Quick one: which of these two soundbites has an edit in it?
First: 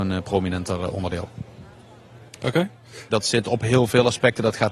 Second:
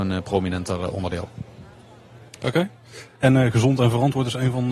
first; 1 cut; at 3.1 s

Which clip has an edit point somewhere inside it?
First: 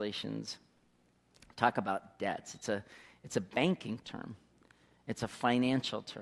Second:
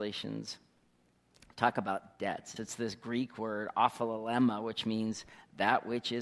second; 1 cut; at 2.6 s

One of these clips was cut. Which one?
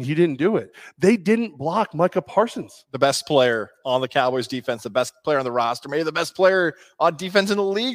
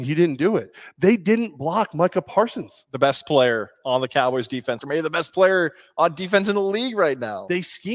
second; 1 cut; at 4.8 s

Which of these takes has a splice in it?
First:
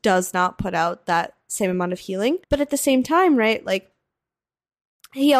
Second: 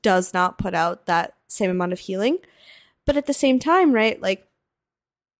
first; 1 cut; at 2.4 s

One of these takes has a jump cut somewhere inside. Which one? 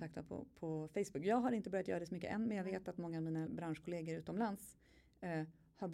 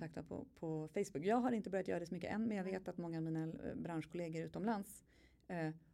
first; 1 cut; at 3.5 s

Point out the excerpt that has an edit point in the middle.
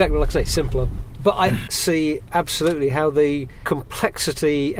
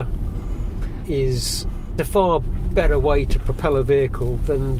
first; 1 cut; at 1.7 s

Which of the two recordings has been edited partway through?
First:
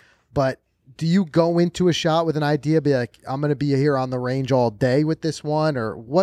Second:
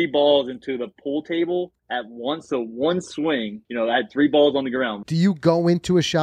second; 3 cuts; at 1.8 s, 3.6 s, 5.0 s

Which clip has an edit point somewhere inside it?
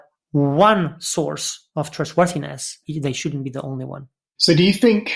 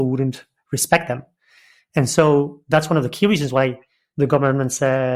first; 1 cut; at 2.8 s

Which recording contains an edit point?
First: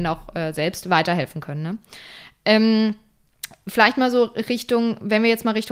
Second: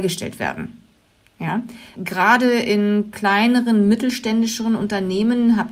second; 1 cut; at 1.9 s

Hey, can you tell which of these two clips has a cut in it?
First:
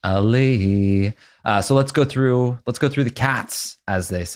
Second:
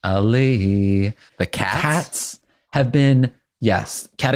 second; 1 cut; at 1.3 s

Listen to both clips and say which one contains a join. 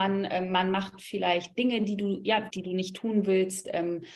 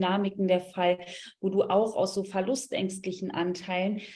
first; 1 cut; at 2.5 s

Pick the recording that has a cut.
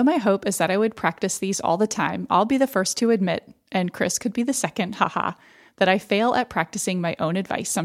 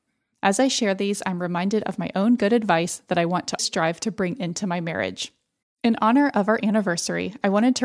second; 2 cuts; at 3.6 s, 5.6 s

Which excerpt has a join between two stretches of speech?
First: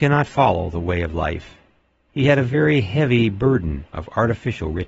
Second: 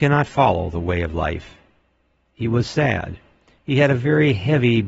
first; 1 cut; at 2.1 s

